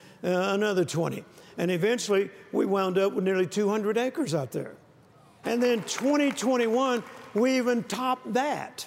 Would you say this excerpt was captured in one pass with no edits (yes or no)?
no